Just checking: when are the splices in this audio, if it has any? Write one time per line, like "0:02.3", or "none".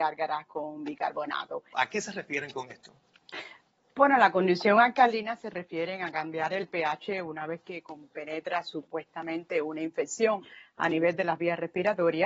0:01.7